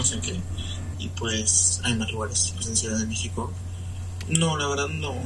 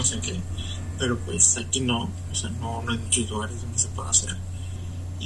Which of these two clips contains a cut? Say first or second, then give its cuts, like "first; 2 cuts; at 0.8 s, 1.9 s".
first; 2 cuts; at 0.9 s, 4.2 s